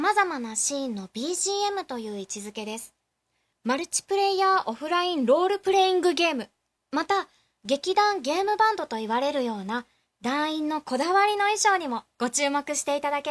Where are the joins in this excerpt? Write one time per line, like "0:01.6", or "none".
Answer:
0:03.5
0:06.8